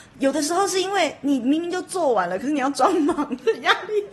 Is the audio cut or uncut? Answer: uncut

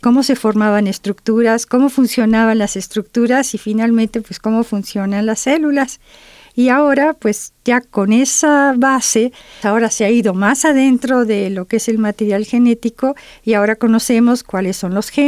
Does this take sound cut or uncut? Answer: cut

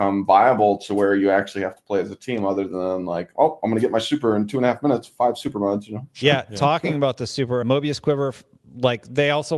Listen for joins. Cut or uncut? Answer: cut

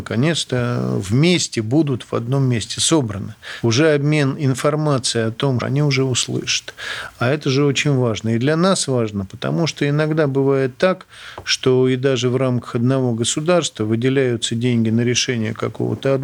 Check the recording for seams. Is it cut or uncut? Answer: cut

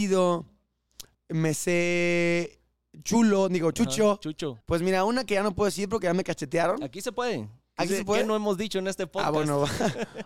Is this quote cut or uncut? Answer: cut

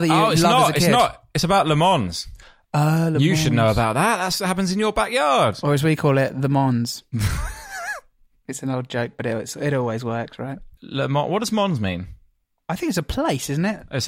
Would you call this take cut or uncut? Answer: uncut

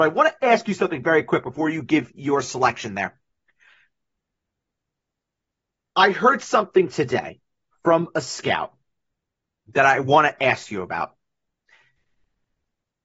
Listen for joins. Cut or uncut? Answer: uncut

